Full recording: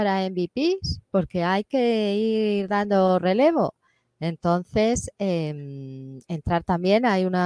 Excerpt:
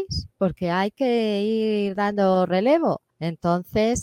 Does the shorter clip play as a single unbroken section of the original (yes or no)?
no